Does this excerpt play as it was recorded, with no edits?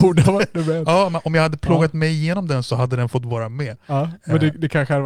yes; 0 cuts

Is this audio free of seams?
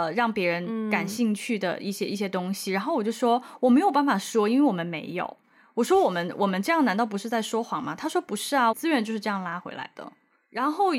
no; 2 cuts; at 5.4 s, 8.7 s

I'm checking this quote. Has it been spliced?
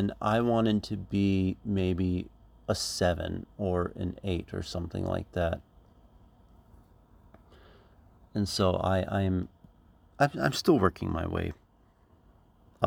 no; 0 cuts

